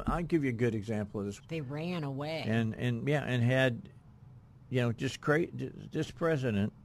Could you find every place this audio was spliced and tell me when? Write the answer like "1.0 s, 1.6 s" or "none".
1.4 s